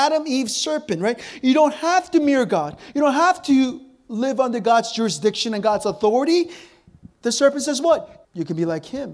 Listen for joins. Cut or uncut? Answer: cut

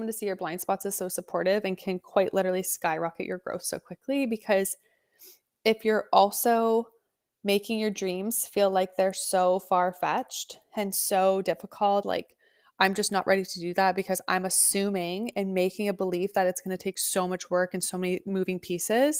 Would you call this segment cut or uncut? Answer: cut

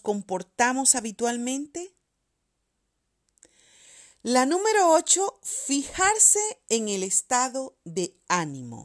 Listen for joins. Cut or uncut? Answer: uncut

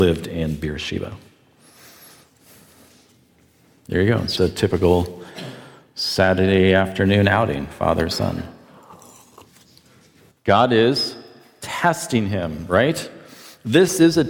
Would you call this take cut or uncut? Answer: cut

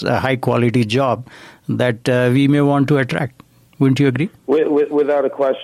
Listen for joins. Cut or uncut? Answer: uncut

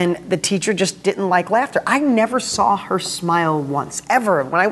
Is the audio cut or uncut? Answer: uncut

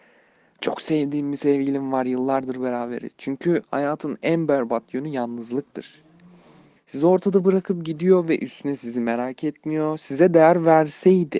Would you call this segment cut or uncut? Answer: cut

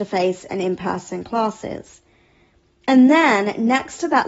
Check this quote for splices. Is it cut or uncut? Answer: uncut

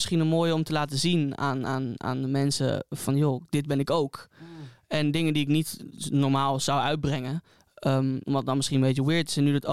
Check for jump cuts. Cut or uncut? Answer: uncut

